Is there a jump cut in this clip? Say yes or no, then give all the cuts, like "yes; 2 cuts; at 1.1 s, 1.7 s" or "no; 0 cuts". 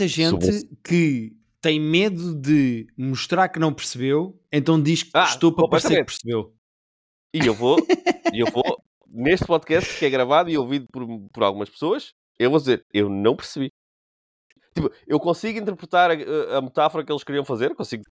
no; 0 cuts